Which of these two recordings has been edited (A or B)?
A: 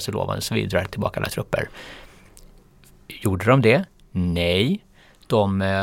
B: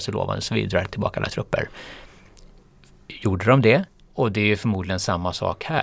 B